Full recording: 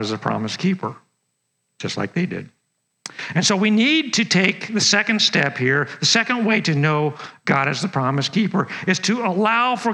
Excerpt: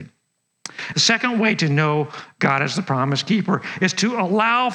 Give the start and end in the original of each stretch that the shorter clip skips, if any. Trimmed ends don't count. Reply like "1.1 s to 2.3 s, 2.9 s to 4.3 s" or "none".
3.3 s to 6.0 s